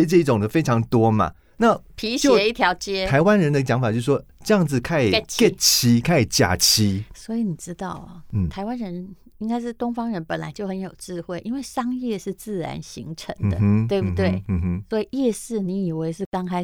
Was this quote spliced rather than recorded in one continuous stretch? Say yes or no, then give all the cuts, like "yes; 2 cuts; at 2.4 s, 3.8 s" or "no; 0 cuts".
no; 0 cuts